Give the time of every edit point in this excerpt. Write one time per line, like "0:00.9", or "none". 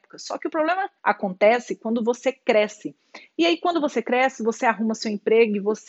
0:01.0